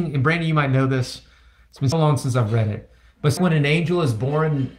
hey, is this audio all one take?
no; 2 cuts; at 1.9 s, 3.4 s

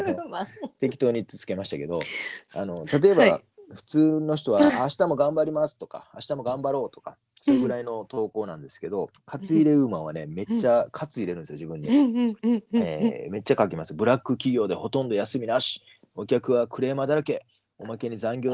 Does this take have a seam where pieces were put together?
no; 0 cuts

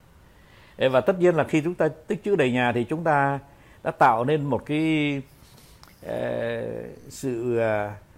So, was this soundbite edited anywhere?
no; 0 cuts

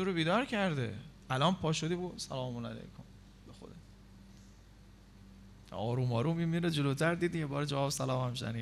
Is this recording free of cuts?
no; 1 cut; at 1.2 s

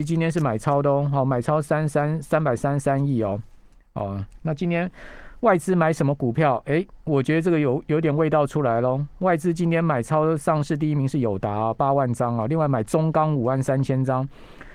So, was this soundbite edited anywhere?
no; 0 cuts

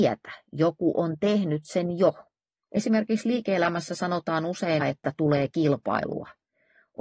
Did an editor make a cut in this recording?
yes; 2 cuts; at 2.6 s, 4.8 s

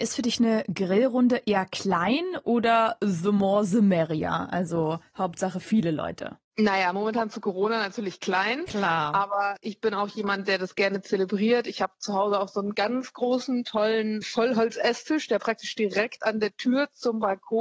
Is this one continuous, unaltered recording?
yes; 0 cuts

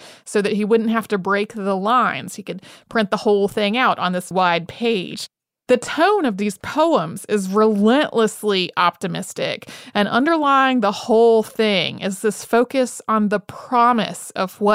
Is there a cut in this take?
yes; 1 cut; at 4.3 s

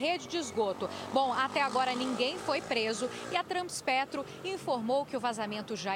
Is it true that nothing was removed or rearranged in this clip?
yes; 0 cuts

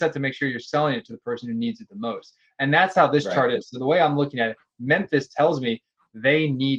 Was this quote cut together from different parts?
no; 0 cuts

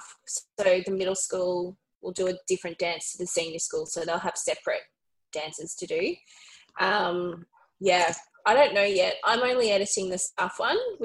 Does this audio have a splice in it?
no; 0 cuts

